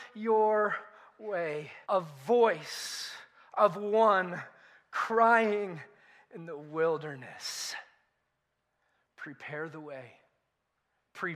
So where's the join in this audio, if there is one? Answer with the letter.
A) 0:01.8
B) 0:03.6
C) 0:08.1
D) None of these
A